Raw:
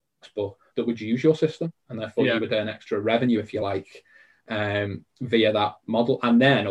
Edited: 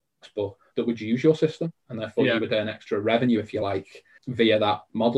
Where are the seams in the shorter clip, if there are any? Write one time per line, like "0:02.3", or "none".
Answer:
0:04.2